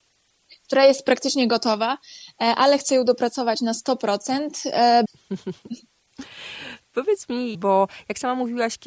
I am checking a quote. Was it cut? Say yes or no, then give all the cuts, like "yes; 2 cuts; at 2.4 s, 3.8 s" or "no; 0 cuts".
yes; 2 cuts; at 5.0 s, 7.5 s